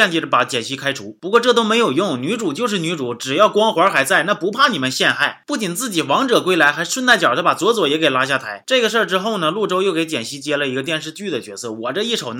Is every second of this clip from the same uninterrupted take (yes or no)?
yes